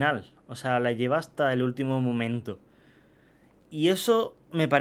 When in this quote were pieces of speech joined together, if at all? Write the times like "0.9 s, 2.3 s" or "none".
none

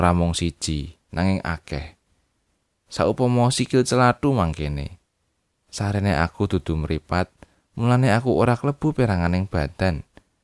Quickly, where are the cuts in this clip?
5.6 s

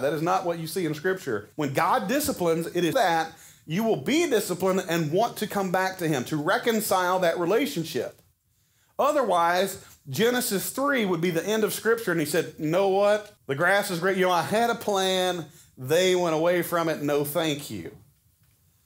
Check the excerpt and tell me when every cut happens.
1.5 s, 2.9 s, 13.4 s

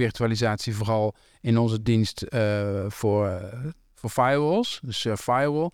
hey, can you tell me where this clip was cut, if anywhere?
none

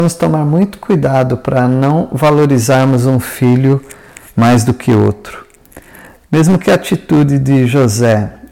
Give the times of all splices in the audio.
6.2 s

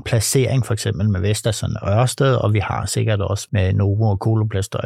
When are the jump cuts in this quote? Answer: 3.5 s

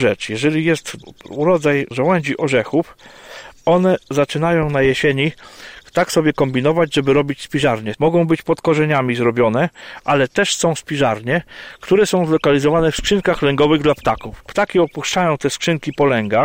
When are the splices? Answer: 7.9 s

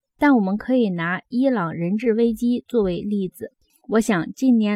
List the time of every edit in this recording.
none

